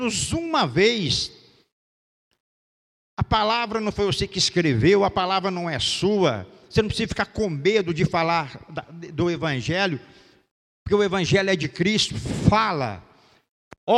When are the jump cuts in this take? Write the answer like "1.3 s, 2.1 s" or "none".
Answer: none